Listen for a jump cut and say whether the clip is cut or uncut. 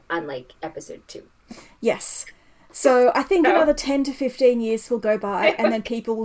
uncut